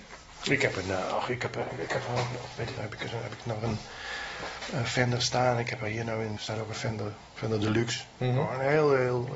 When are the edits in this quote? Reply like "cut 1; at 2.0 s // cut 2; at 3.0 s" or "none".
cut 1; at 2.8 s // cut 2; at 6.4 s